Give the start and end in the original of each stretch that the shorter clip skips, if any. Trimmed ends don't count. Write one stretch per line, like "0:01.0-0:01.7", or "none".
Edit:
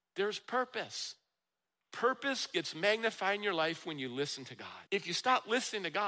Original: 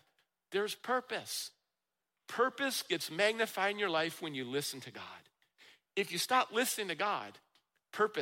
0:05.2-0:05.9